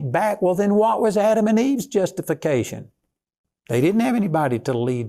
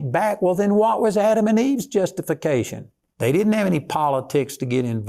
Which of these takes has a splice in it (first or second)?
second